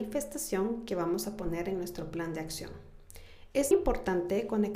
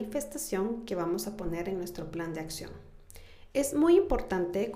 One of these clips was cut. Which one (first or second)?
first